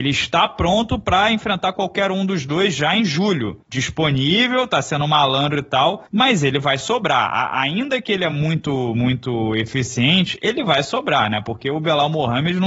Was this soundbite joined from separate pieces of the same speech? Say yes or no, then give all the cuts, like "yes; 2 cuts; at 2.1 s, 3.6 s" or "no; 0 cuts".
no; 0 cuts